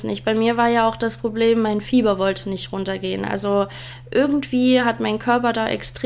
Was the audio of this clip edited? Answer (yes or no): no